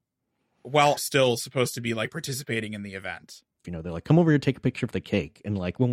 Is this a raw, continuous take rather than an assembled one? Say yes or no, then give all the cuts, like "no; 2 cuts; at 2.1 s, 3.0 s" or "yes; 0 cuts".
no; 2 cuts; at 1.0 s, 3.6 s